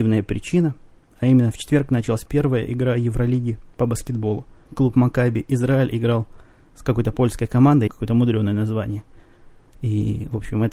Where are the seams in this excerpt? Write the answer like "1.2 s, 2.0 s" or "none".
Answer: 7.9 s, 9.6 s